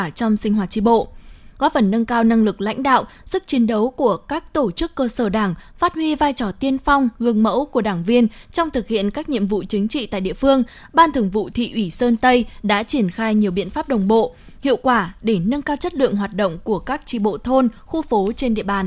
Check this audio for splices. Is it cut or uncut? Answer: uncut